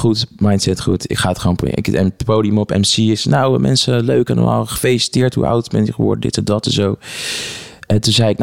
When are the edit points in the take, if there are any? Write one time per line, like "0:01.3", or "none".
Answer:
none